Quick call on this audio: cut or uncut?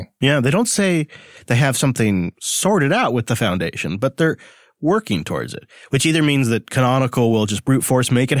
uncut